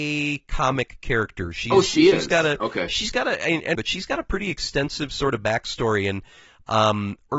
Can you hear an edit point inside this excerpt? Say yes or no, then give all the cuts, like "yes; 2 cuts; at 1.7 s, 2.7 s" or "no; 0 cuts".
yes; 1 cut; at 3.7 s